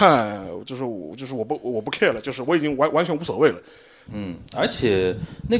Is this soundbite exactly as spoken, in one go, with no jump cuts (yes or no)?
no